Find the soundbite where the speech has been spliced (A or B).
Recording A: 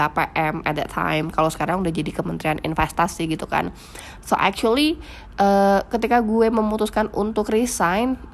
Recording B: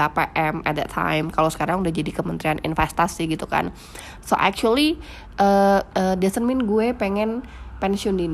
B